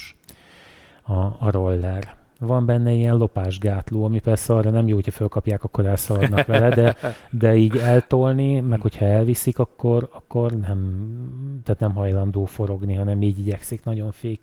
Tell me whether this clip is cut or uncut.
uncut